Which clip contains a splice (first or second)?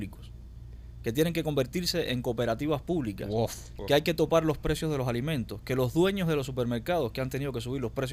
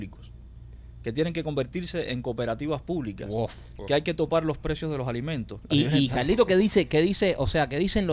second